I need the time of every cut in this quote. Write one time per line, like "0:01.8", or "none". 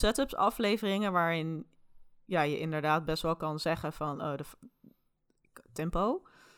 none